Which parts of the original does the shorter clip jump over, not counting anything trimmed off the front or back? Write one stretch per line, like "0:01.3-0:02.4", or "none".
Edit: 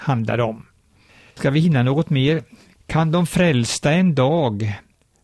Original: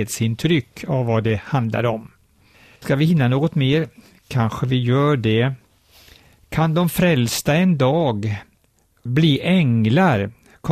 0:04.2-0:06.4